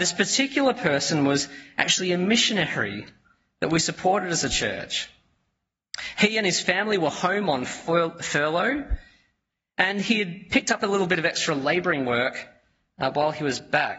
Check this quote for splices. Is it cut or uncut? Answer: uncut